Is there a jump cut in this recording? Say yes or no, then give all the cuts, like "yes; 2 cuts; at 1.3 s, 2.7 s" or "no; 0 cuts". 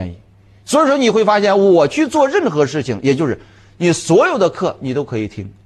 no; 0 cuts